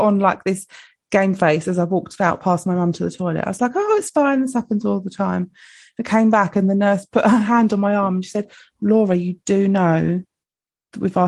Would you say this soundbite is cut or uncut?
uncut